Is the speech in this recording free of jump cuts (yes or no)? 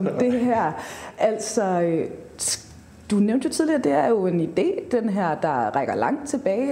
yes